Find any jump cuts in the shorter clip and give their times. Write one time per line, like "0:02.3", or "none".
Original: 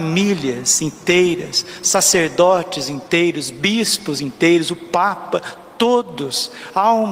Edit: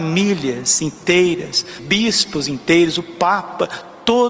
0:01.8